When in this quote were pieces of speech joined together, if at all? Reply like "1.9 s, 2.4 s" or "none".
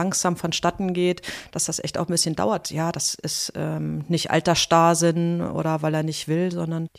2.6 s